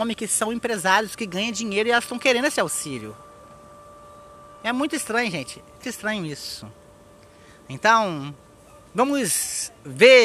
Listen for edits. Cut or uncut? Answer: cut